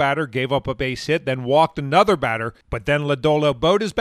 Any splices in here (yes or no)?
no